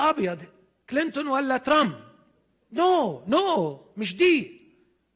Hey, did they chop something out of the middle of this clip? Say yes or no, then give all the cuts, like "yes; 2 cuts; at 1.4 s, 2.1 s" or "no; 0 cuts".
no; 0 cuts